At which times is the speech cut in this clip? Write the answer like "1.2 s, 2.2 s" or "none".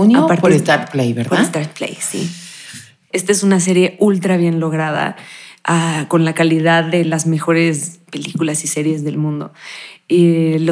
3.1 s